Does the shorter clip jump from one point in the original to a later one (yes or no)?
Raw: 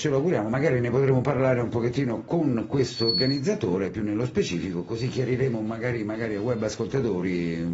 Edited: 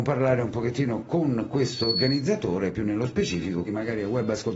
yes